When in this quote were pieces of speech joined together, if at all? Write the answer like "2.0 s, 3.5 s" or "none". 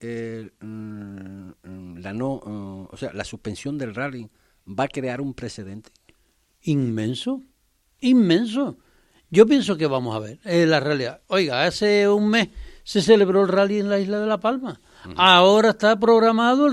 none

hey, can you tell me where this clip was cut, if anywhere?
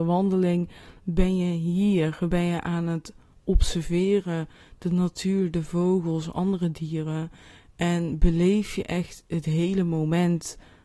none

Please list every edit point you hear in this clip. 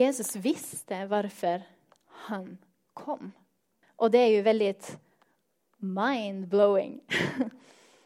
3.8 s

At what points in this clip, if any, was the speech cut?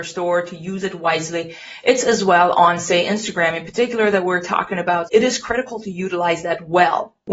5.1 s

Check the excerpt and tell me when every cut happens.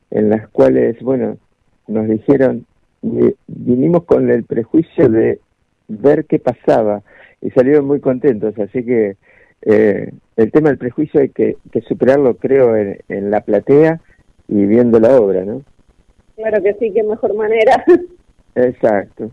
none

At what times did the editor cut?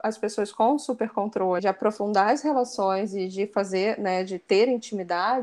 1.6 s

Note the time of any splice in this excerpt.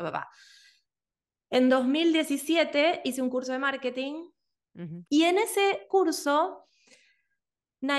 5.0 s

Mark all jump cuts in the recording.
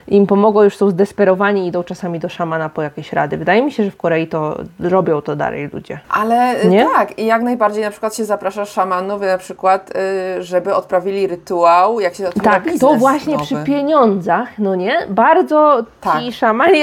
6.0 s

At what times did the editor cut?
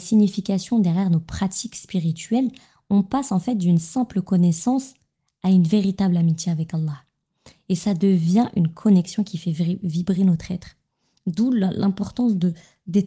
none

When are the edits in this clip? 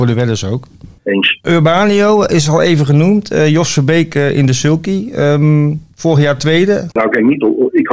6.9 s

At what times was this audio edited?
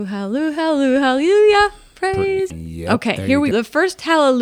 2.5 s, 3.5 s

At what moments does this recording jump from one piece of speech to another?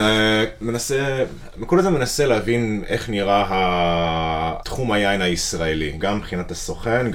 4.6 s, 6.0 s

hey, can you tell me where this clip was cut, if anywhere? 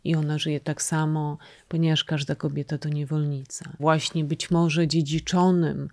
3.8 s

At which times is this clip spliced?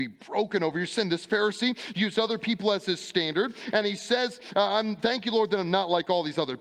none

